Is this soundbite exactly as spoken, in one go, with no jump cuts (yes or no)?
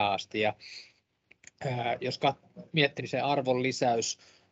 no